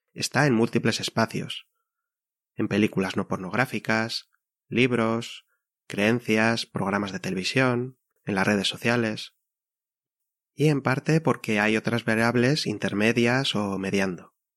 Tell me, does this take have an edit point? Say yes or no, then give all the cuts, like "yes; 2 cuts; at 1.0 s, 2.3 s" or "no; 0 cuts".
no; 0 cuts